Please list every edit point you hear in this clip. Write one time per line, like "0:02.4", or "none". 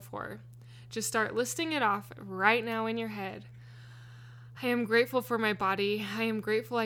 none